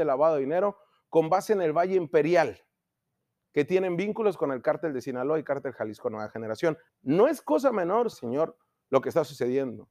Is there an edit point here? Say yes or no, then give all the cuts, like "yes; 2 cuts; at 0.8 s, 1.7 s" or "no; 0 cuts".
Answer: yes; 2 cuts; at 6.9 s, 8.1 s